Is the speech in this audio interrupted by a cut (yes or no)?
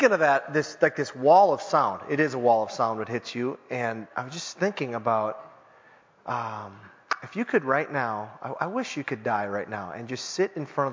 no